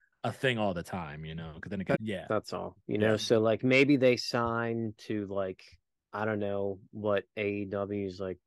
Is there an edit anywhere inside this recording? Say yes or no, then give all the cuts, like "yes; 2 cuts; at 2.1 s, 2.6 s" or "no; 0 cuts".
yes; 1 cut; at 1.9 s